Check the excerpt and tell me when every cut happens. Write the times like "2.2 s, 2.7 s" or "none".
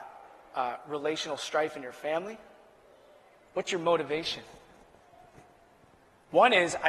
none